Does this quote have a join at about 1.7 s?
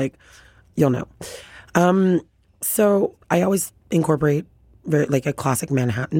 no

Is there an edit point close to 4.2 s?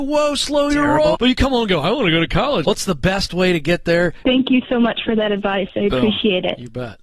yes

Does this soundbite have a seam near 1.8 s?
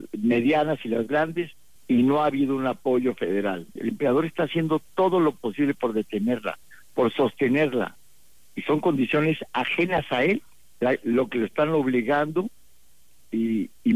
yes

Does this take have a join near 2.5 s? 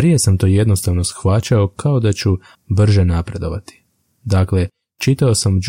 yes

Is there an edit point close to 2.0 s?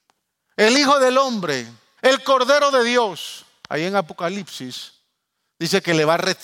yes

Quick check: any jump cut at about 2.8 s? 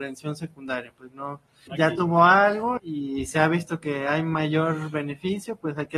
yes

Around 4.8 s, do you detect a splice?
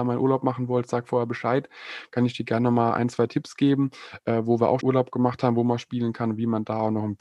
yes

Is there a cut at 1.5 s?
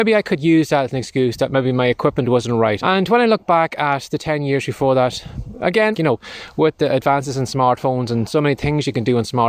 no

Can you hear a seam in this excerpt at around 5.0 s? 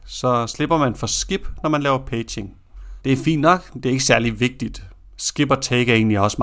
no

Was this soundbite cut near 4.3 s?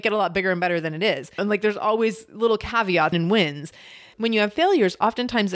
no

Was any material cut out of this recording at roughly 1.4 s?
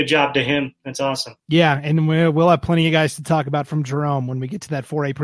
yes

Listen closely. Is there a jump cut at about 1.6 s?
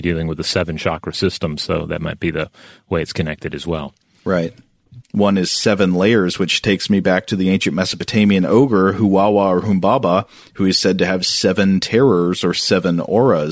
no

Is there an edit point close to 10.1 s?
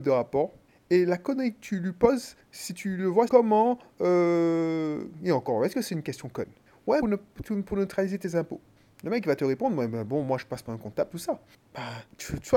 no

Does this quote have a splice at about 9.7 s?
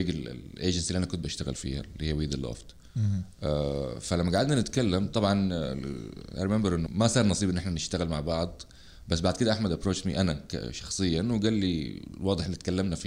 no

